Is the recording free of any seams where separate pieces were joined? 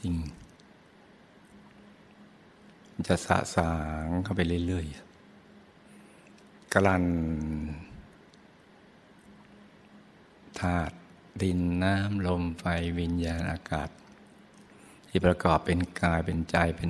yes; 0 cuts

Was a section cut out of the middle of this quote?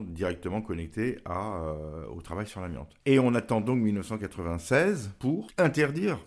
yes; 2 cuts; at 3.0 s, 5.2 s

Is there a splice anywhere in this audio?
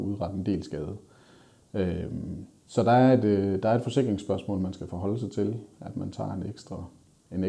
no; 0 cuts

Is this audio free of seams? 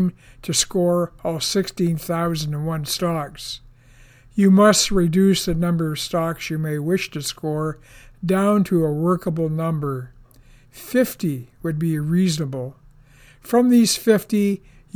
yes; 0 cuts

